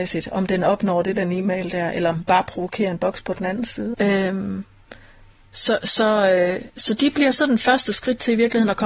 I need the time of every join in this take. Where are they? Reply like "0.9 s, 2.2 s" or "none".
1.2 s, 3.9 s